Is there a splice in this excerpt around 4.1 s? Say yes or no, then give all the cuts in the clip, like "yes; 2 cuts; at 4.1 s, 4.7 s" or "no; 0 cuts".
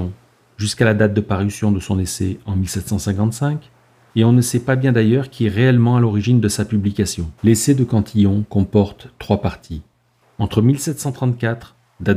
yes; 3 cuts; at 4.1 s, 7.4 s, 10.2 s